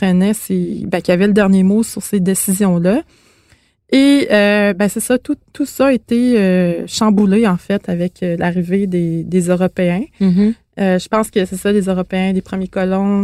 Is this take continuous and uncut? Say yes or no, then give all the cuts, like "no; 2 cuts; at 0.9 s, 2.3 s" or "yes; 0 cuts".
yes; 0 cuts